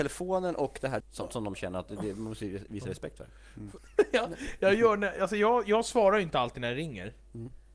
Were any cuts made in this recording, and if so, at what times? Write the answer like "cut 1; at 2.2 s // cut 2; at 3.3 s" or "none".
cut 1; at 1.0 s // cut 2; at 3.8 s